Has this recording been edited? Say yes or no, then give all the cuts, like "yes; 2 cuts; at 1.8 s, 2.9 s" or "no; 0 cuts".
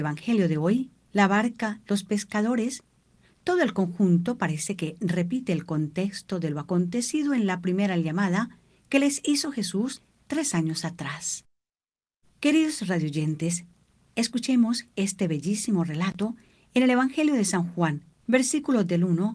yes; 3 cuts; at 1.1 s, 12.2 s, 18.2 s